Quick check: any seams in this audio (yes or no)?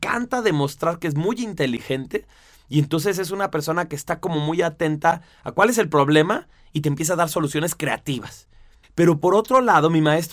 yes